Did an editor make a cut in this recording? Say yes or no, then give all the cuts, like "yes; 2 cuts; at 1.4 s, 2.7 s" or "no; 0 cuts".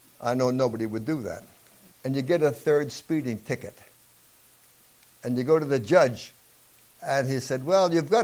yes; 1 cut; at 1.9 s